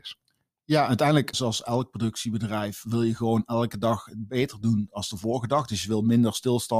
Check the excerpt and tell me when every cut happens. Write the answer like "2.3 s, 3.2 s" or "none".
1.3 s